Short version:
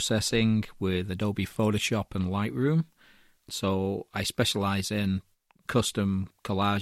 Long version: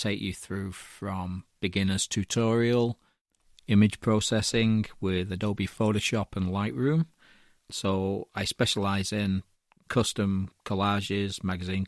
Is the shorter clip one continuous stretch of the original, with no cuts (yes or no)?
yes